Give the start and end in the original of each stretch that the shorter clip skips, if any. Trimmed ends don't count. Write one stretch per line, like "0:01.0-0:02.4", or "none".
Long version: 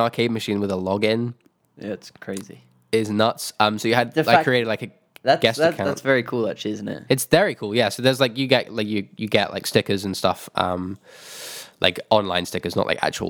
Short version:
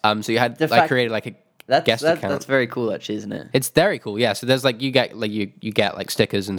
none